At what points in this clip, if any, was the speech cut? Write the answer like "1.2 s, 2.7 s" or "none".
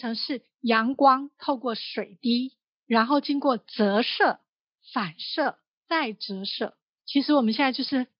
none